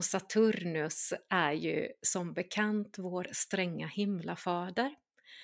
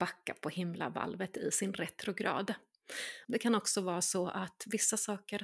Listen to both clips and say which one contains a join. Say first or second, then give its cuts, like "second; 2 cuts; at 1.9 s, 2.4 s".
second; 1 cut; at 3.2 s